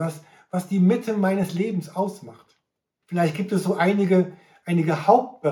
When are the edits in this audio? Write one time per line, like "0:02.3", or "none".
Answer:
0:03.0